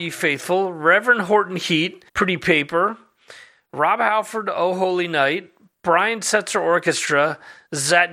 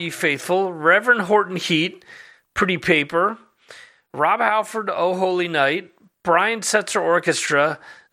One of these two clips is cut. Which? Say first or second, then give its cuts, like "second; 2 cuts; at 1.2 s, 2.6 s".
first; 1 cut; at 2.1 s